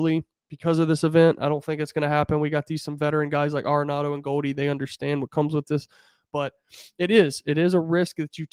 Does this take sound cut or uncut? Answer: uncut